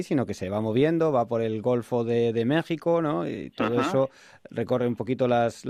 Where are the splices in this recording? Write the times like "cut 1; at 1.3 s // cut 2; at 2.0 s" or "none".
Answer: none